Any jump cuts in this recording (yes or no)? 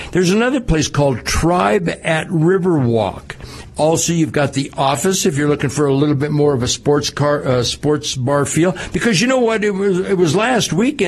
yes